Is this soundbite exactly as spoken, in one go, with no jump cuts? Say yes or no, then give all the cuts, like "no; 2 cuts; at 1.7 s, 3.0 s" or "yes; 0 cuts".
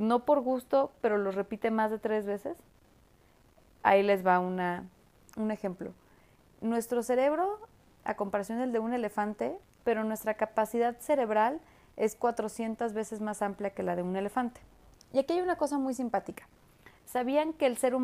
no; 2 cuts; at 9.6 s, 14.9 s